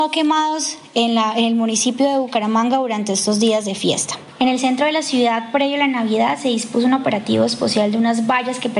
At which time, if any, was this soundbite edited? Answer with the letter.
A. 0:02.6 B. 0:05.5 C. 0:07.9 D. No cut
D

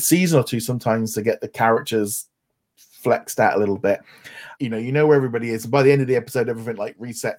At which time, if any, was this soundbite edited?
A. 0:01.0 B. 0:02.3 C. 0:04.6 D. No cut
C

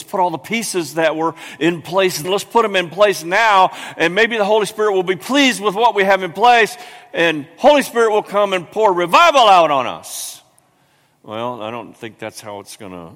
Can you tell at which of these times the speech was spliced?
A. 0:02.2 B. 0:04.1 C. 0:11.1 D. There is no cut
A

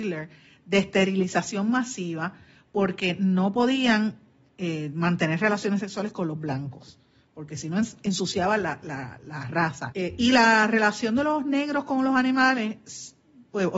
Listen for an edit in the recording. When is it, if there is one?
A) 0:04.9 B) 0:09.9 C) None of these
B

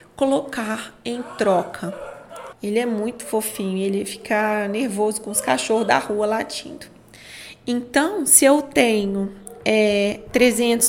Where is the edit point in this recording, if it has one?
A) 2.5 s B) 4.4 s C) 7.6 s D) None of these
A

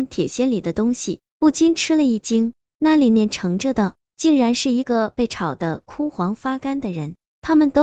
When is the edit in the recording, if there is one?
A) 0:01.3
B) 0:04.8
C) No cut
B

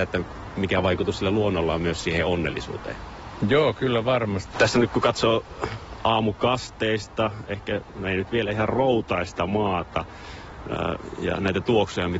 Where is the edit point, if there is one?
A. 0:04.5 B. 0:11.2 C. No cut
A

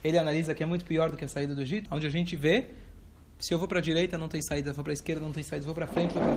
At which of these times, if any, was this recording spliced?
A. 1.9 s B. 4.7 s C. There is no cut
A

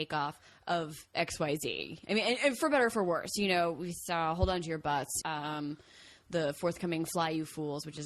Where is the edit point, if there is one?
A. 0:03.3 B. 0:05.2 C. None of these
B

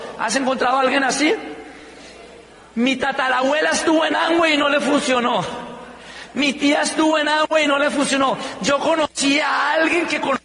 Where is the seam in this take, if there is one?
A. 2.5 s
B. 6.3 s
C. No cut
C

